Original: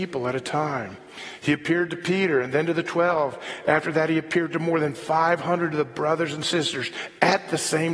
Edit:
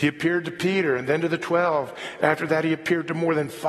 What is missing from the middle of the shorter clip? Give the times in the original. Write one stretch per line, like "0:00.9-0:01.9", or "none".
none